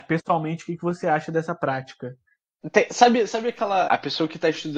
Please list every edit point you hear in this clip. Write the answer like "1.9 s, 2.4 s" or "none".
2.6 s, 3.9 s